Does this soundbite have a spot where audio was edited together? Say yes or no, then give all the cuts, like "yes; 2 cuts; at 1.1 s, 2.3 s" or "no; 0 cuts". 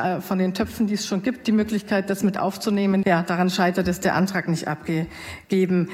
yes; 1 cut; at 3.0 s